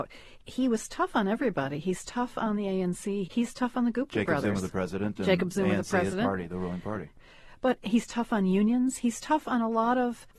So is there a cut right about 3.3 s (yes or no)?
yes